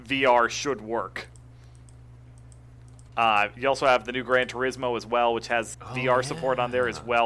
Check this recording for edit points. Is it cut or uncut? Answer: cut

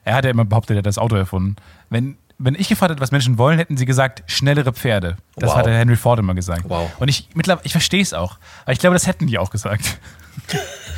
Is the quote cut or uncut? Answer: cut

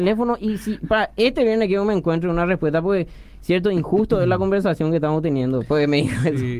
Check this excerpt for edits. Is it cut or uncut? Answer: uncut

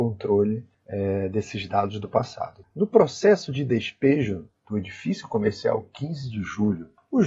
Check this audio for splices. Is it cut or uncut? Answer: cut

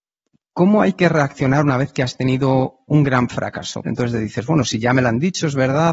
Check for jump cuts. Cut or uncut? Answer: cut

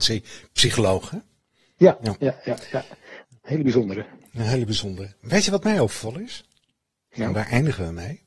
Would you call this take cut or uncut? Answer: uncut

